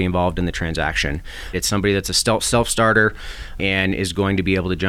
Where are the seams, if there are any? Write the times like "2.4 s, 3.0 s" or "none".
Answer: 1.5 s, 3.6 s

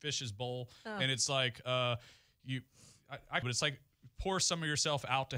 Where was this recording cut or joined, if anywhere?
3.4 s

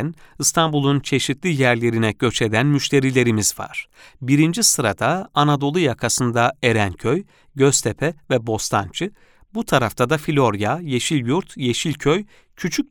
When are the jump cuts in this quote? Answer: none

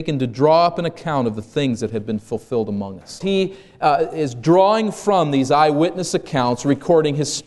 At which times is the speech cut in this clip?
3.2 s

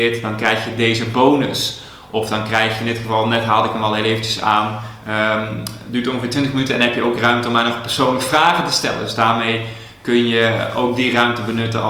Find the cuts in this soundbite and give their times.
none

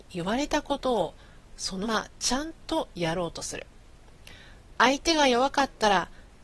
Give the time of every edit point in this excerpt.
1.8 s

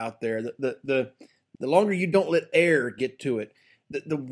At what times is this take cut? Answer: 1.5 s

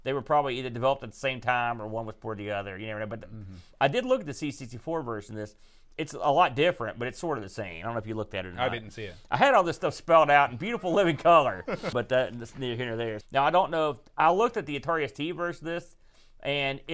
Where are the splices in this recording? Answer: 11.9 s, 13.2 s

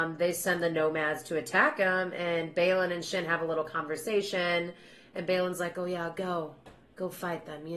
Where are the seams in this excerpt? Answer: none

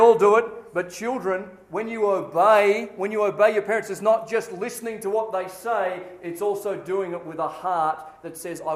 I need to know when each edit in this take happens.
none

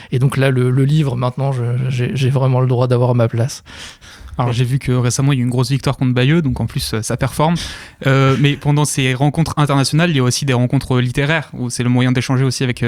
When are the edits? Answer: none

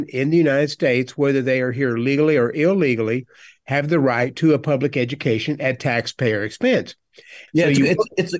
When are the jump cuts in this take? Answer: 7.5 s

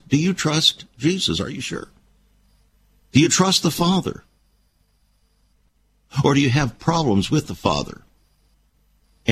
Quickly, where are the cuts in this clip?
none

